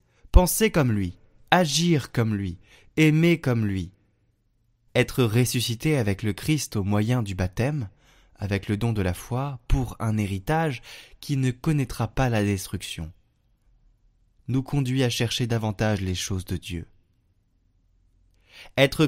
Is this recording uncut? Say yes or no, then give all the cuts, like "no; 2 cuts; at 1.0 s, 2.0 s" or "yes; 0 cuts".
no; 1 cut; at 4.9 s